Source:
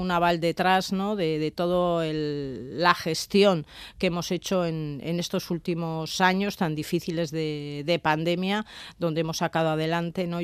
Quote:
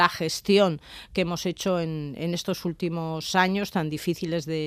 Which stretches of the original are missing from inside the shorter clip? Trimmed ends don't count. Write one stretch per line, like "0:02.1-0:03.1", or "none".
none